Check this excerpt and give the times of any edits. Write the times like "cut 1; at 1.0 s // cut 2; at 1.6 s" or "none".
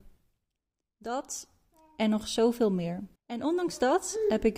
cut 1; at 3.2 s